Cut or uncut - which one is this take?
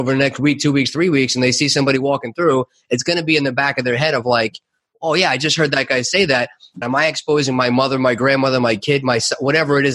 cut